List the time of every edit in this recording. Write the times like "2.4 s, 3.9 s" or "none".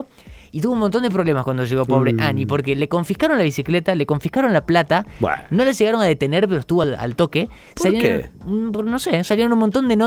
none